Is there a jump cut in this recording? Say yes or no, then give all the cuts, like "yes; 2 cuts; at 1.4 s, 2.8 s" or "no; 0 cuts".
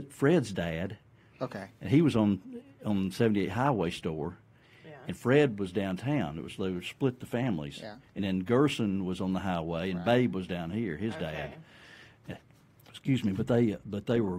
no; 0 cuts